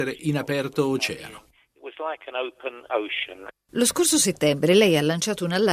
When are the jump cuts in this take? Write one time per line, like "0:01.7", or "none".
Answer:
none

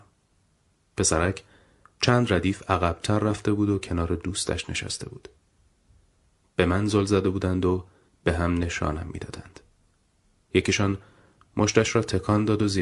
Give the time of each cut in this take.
0:06.4

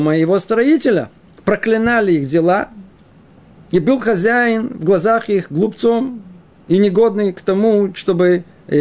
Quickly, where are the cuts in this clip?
none

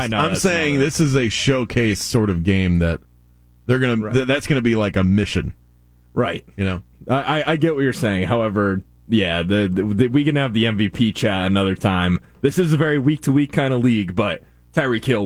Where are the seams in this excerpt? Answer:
none

